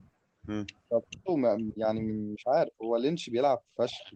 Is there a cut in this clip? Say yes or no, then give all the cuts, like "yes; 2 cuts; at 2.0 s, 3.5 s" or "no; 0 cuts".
no; 0 cuts